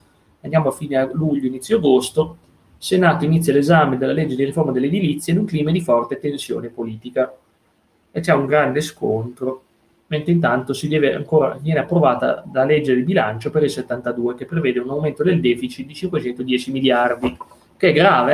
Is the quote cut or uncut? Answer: uncut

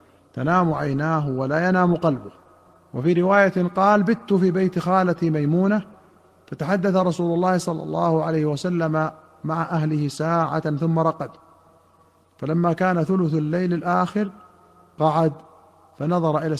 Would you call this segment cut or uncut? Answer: uncut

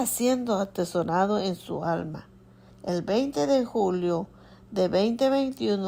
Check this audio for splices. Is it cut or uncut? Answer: cut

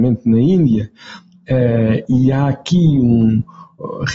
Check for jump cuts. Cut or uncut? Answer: uncut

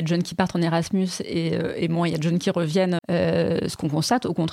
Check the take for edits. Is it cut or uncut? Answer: cut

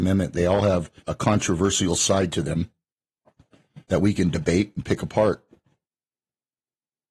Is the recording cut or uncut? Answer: cut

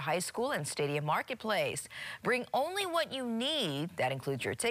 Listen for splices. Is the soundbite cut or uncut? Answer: uncut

